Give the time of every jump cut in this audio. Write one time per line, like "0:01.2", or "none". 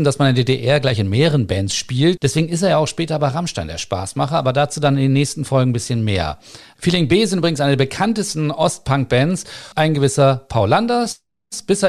0:02.2
0:09.7